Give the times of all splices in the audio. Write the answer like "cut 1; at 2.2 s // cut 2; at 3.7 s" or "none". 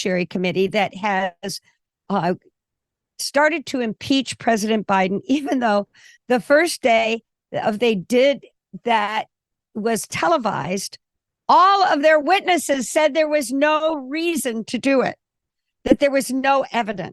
none